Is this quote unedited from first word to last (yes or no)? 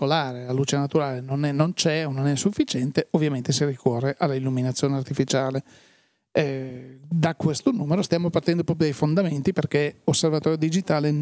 yes